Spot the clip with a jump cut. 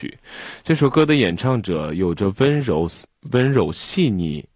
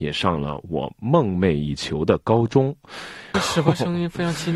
second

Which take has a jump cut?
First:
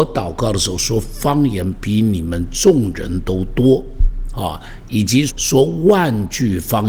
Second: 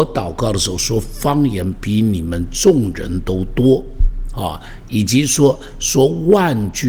first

